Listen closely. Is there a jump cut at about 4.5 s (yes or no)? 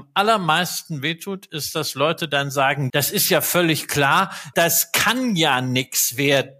yes